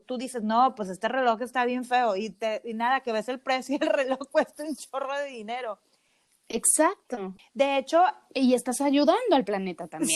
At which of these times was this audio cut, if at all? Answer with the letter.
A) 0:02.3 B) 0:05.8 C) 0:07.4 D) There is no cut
C